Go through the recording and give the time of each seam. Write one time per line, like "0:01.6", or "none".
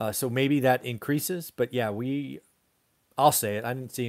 0:03.1